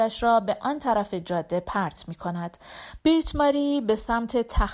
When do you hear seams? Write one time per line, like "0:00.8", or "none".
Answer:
0:03.0